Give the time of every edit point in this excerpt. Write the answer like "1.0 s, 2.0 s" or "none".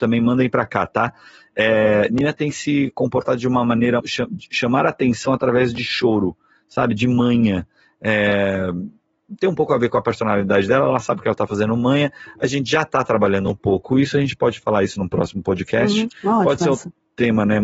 4.0 s